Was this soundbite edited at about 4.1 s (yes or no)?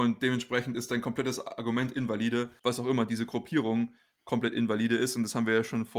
no